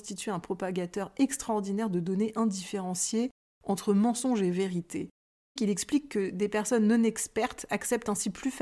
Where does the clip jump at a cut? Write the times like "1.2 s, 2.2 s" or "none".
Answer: 5.6 s